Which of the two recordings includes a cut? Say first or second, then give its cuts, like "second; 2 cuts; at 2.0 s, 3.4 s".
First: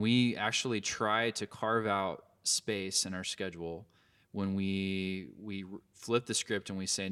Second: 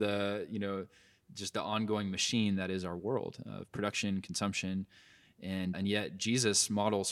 second; 1 cut; at 5.7 s